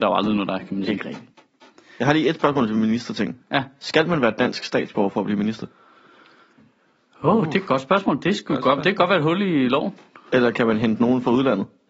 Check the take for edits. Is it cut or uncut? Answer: uncut